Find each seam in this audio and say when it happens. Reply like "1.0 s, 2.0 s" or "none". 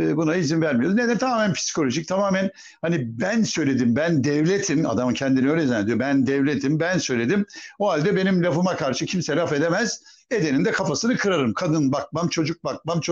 none